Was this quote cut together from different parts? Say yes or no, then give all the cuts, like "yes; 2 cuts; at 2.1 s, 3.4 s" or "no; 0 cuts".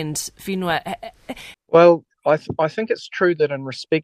yes; 1 cut; at 1.5 s